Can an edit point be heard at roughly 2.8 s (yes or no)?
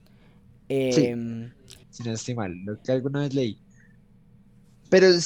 yes